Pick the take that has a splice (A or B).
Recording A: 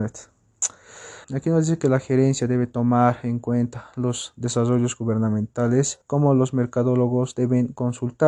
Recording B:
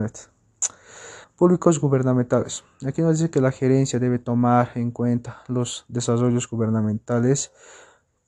A